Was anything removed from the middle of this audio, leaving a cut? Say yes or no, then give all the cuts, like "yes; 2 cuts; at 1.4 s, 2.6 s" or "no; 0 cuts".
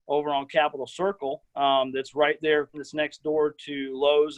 yes; 1 cut; at 2.7 s